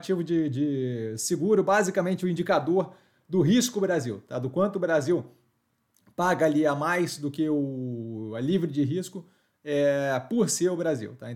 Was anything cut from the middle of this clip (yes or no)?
no